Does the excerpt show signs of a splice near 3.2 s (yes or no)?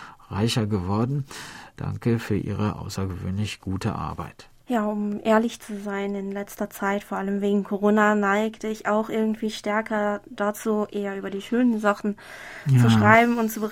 no